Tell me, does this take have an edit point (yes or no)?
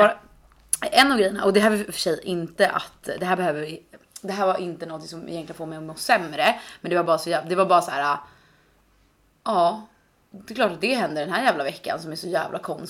no